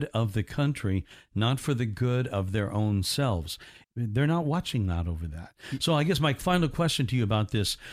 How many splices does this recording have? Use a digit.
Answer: 1